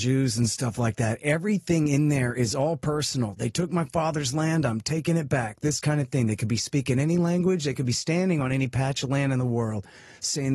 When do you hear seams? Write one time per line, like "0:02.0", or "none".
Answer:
none